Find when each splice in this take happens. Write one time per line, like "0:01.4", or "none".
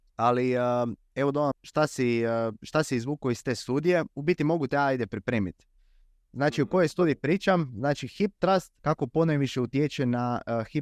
0:01.5
0:08.8